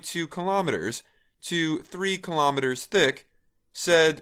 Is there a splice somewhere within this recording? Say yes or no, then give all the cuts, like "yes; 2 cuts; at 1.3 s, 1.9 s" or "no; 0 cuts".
no; 0 cuts